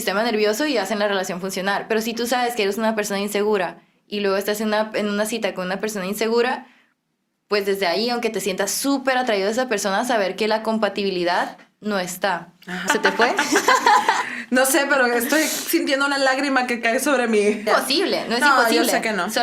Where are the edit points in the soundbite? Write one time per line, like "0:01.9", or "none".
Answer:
0:12.9
0:17.7